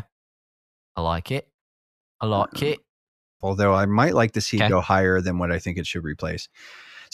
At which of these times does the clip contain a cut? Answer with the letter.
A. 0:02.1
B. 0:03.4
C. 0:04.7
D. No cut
B